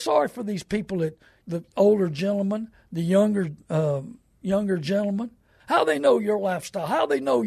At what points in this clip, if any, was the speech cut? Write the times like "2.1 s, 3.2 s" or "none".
1.4 s, 5.6 s